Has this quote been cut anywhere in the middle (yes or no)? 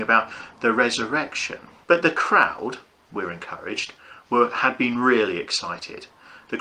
yes